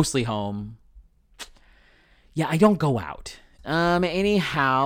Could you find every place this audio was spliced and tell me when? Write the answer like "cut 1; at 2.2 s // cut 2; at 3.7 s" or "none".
cut 1; at 3.6 s